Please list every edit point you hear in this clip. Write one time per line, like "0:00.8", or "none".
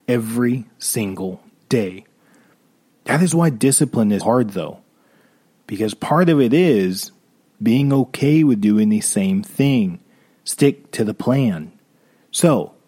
0:04.2